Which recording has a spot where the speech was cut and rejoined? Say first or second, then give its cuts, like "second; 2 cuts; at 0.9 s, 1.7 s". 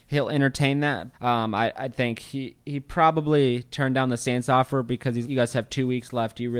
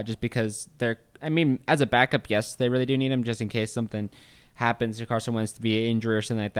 first; 2 cuts; at 1.1 s, 5.2 s